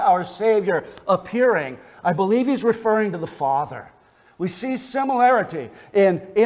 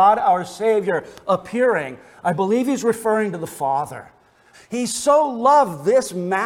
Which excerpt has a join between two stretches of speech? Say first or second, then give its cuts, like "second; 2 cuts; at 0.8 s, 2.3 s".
second; 1 cut; at 4.5 s